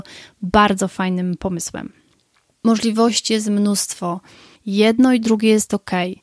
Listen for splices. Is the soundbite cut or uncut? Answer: cut